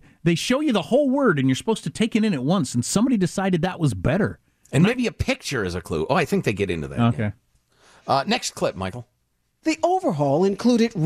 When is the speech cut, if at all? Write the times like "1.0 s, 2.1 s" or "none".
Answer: none